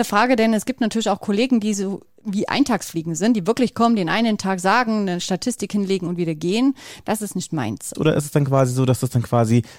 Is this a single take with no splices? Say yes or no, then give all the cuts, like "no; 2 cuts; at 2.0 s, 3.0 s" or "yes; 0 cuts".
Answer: no; 1 cut; at 7.9 s